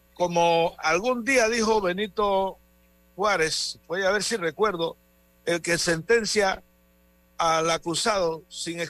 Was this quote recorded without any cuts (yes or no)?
yes